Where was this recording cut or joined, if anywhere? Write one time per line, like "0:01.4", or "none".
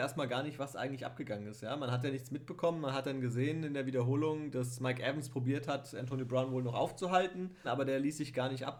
0:07.6